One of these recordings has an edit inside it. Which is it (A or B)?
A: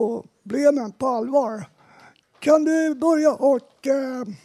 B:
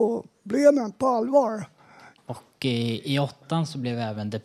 B